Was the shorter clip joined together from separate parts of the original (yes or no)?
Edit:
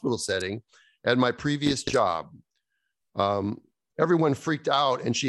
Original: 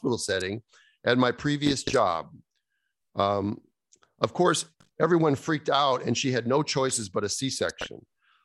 yes